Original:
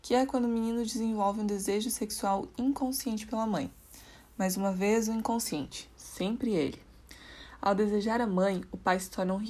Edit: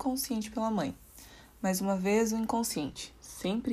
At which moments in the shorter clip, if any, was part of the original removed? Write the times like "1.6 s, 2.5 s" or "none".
none